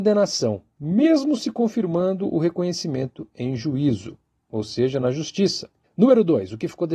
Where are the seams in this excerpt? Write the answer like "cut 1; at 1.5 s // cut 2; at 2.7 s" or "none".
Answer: cut 1; at 5.8 s